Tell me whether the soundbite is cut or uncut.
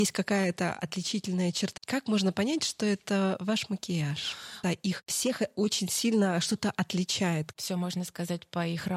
cut